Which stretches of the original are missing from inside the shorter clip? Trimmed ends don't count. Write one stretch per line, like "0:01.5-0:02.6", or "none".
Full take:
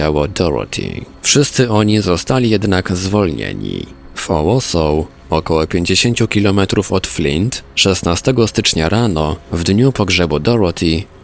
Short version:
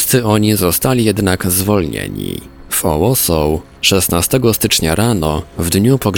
0:05.2-0:07.7